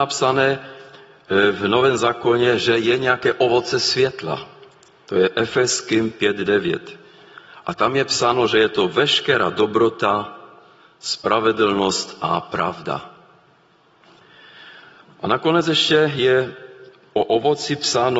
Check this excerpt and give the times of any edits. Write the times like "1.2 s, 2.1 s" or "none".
none